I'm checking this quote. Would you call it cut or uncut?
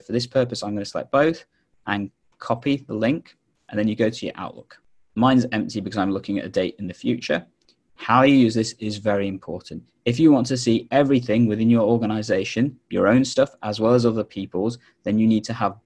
cut